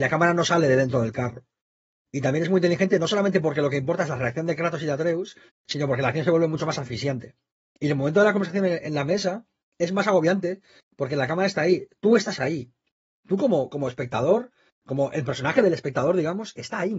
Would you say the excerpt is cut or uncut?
uncut